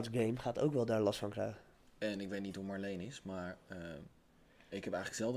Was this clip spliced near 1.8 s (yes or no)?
no